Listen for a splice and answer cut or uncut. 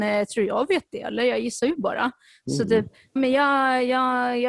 cut